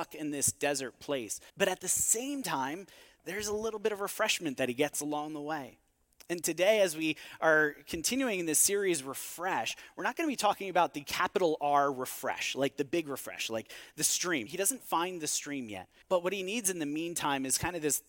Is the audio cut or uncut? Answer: cut